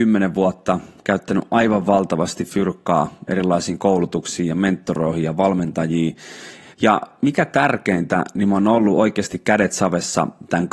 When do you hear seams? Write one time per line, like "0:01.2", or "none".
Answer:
none